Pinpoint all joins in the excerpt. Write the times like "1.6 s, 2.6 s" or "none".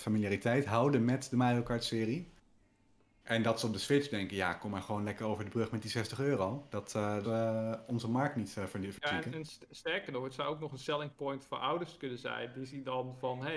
7.2 s